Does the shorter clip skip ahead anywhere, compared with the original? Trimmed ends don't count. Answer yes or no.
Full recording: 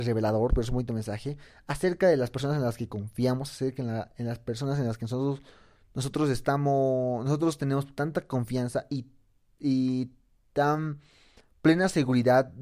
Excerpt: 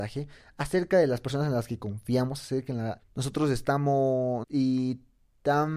yes